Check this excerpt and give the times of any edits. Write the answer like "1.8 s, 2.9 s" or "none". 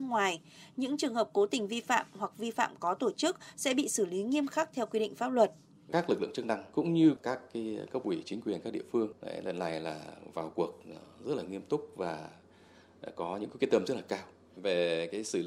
none